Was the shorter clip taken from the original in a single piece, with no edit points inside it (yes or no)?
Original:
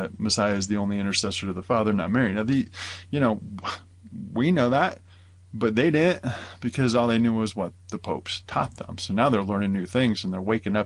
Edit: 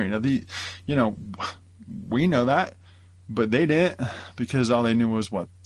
yes